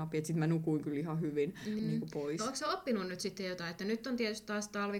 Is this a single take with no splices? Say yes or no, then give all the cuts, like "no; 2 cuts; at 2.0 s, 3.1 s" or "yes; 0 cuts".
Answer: no; 1 cut; at 1.8 s